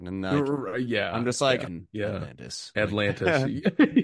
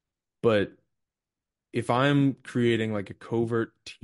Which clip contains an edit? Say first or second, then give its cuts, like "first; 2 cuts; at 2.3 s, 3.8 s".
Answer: first; 1 cut; at 1.7 s